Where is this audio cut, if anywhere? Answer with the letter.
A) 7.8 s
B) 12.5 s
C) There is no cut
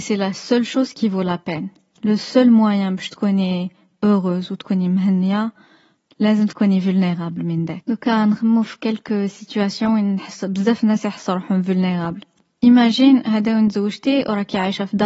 A